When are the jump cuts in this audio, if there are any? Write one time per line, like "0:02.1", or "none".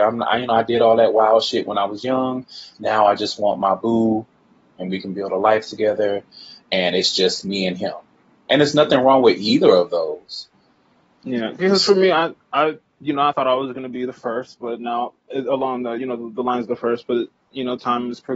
0:13.3